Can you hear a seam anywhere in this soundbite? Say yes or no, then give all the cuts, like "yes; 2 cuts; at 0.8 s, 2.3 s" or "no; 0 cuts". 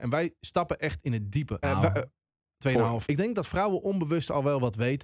yes; 2 cuts; at 1.6 s, 3.1 s